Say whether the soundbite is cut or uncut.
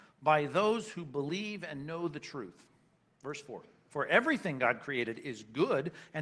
uncut